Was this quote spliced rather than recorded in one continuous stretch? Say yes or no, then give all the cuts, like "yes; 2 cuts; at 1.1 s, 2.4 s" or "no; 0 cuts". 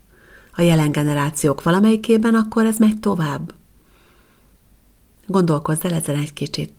no; 0 cuts